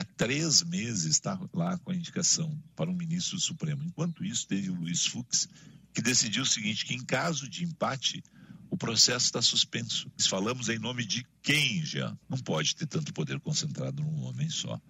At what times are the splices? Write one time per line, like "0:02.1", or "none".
0:10.2
0:12.2